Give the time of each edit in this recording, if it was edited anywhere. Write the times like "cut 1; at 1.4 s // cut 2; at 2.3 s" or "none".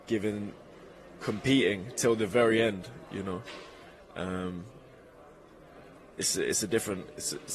none